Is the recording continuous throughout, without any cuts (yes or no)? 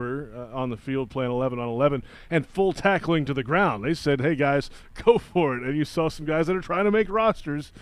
yes